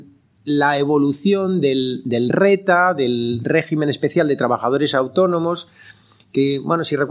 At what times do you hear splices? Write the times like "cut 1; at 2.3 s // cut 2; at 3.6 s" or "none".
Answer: none

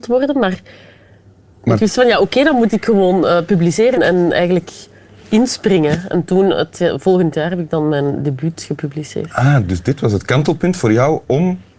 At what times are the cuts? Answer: cut 1; at 4.0 s

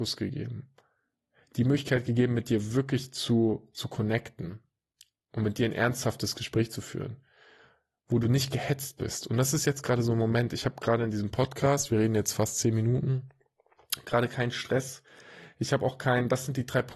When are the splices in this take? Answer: none

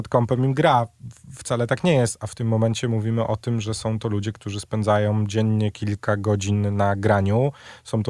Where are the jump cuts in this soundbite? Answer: none

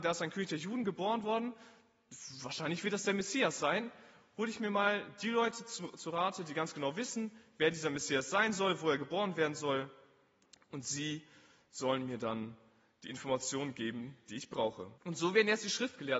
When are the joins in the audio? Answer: cut 1; at 15.0 s

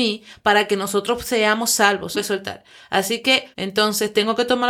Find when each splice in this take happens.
cut 1; at 2.1 s // cut 2; at 3.5 s

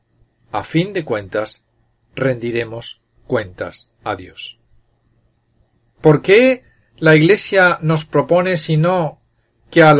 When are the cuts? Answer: cut 1; at 5.9 s

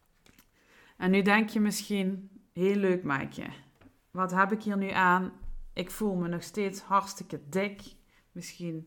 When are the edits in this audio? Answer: none

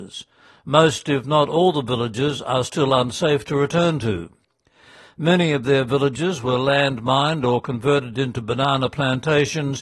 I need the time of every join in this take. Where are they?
none

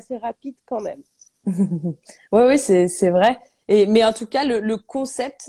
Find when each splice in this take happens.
cut 1; at 1.3 s

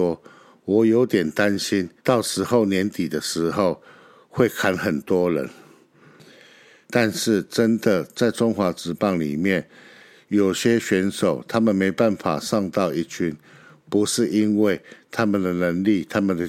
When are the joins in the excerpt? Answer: cut 1; at 2.0 s // cut 2; at 6.8 s

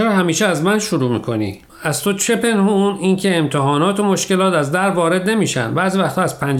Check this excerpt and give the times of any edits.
cut 1; at 1.7 s

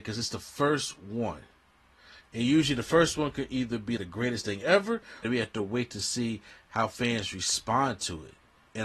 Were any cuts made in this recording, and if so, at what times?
cut 1; at 4.0 s // cut 2; at 5.2 s

